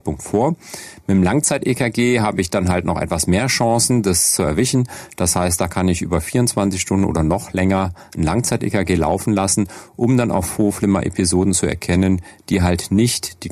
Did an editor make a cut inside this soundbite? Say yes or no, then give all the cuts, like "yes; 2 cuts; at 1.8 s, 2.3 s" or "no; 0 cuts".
no; 0 cuts